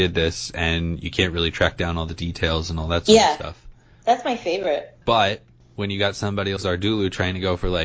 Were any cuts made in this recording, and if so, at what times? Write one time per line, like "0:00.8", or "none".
0:05.0
0:06.6